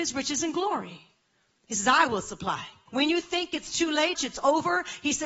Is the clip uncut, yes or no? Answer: no